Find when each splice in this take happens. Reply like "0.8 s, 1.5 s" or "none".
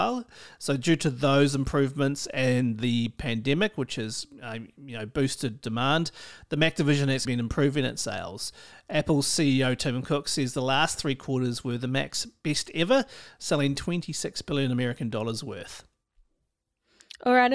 7.2 s